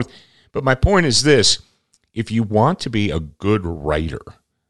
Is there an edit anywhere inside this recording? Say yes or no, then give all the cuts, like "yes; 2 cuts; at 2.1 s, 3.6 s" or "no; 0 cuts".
no; 0 cuts